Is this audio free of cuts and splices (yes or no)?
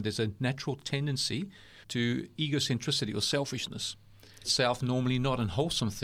no